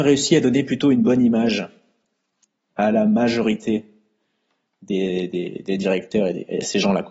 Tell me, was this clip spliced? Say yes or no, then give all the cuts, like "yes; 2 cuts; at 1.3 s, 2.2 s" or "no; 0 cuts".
no; 0 cuts